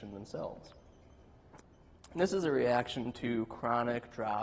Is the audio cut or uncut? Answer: cut